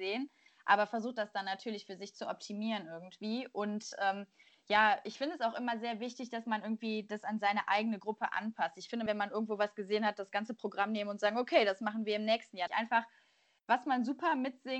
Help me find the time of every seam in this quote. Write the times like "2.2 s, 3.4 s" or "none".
9.1 s, 12.7 s